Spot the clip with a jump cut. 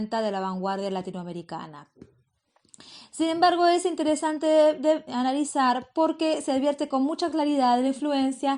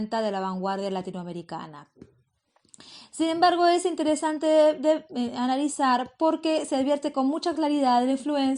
first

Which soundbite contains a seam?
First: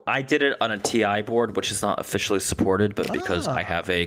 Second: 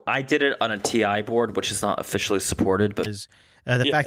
second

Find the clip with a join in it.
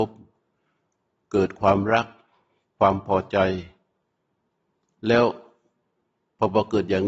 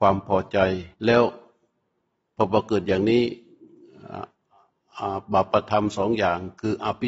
second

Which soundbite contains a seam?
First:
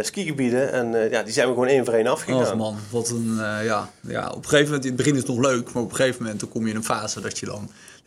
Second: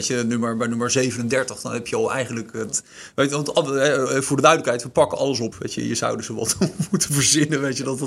second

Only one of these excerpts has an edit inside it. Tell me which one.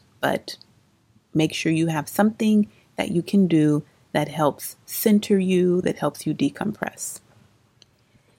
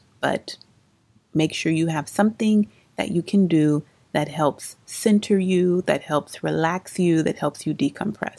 first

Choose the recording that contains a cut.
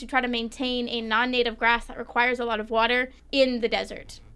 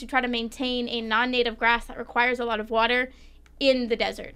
first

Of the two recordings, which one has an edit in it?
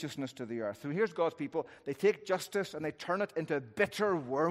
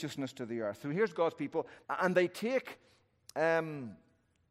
second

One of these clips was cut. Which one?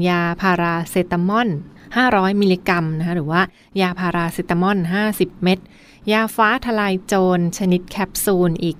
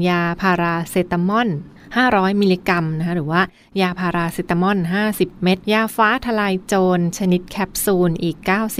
second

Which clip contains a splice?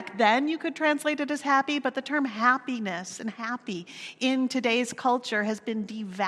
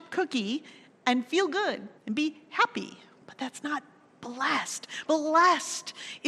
second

